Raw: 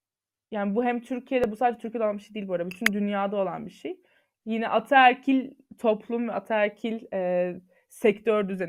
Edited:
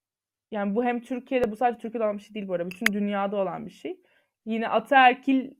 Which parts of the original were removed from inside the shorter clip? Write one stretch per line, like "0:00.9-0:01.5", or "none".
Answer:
none